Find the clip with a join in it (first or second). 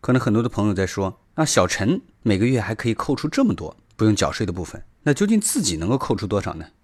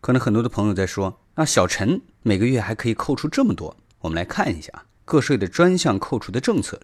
second